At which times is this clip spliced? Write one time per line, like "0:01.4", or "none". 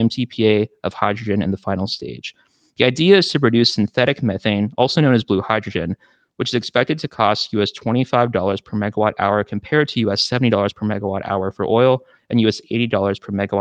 none